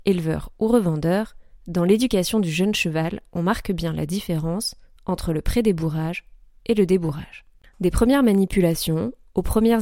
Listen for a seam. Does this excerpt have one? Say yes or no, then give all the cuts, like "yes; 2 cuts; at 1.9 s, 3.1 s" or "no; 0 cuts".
yes; 1 cut; at 7.6 s